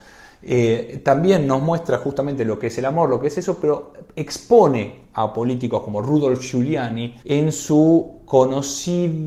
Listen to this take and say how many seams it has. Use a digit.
0